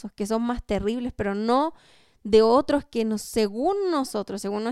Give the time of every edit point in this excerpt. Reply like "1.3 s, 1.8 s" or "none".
none